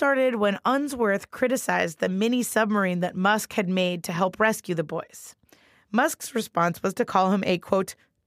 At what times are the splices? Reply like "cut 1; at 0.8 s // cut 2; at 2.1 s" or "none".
none